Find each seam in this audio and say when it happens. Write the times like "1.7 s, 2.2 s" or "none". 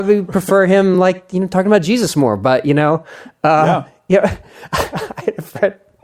none